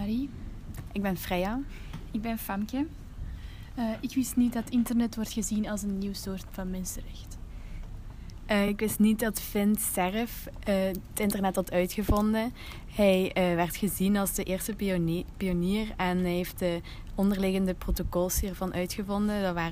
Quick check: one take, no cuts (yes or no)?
yes